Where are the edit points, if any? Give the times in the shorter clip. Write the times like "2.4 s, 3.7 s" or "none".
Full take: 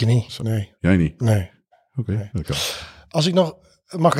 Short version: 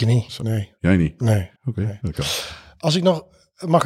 1.6 s